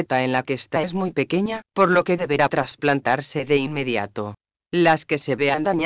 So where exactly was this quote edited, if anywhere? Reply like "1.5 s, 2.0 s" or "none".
4.6 s